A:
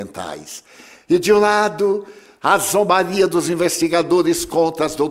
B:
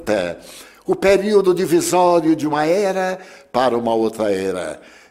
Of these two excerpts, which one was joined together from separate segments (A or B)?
A